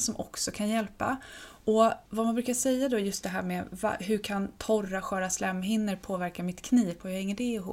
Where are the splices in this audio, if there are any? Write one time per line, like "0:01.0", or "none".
0:02.1